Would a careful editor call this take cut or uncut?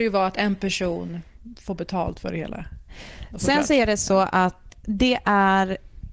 cut